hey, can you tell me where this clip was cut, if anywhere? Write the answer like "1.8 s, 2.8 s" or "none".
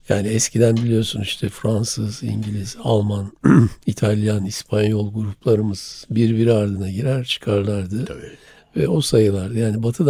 none